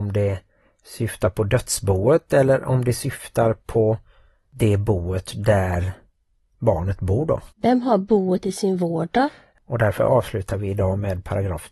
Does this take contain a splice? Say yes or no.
yes